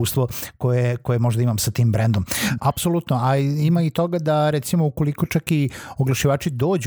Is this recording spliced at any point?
yes; 1 cut; at 2.6 s

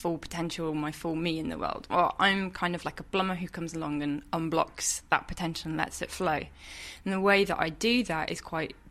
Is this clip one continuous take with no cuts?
yes; 0 cuts

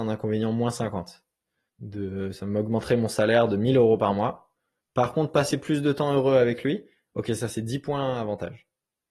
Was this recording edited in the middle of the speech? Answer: yes; 2 cuts; at 1.7 s, 4.8 s

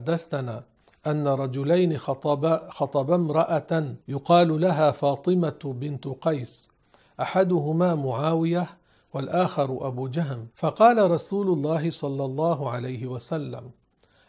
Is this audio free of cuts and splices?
no; 2 cuts; at 4.0 s, 10.5 s

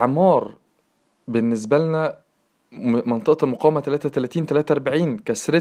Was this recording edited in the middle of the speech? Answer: no; 0 cuts

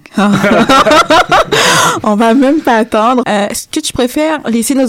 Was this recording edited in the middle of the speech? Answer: yes; 1 cut; at 3.2 s

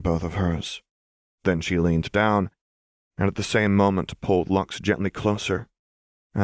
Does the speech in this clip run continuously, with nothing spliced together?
no; 1 cut; at 1.3 s

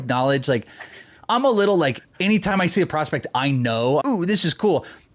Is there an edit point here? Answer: yes; 1 cut; at 4.0 s

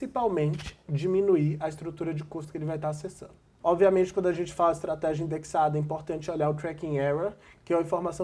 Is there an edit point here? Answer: yes; 1 cut; at 3.6 s

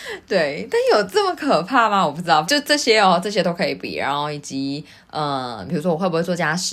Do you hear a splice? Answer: yes; 1 cut; at 2.4 s

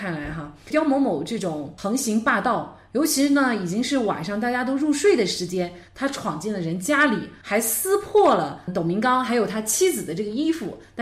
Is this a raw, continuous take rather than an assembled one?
yes; 0 cuts

